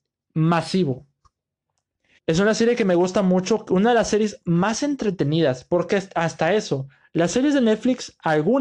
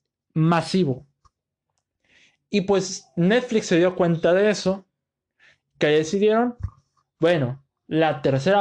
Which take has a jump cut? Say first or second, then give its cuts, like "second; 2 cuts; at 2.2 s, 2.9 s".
first; 1 cut; at 2.2 s